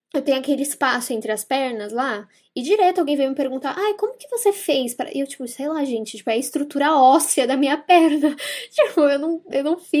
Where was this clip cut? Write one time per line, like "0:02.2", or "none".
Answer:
none